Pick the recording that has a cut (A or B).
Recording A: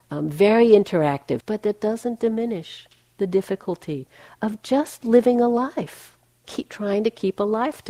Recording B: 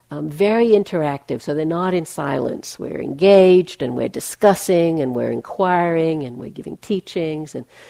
A